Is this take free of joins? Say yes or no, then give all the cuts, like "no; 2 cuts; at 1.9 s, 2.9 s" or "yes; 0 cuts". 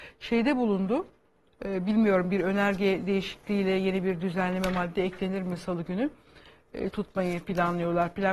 no; 2 cuts; at 1.5 s, 6.9 s